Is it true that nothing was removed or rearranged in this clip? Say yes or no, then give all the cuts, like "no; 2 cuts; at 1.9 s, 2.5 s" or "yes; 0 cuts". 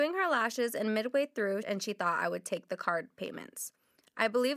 no; 1 cut; at 1.6 s